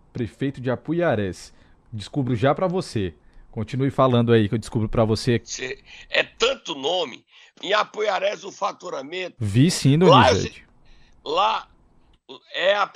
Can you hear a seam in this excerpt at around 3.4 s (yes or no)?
no